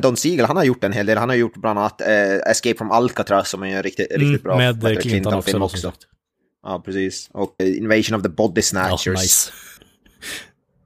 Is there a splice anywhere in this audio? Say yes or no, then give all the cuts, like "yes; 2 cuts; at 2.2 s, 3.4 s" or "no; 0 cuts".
yes; 2 cuts; at 7.6 s, 9.8 s